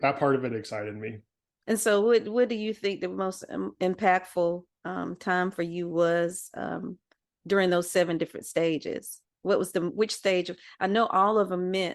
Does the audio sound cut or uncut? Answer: cut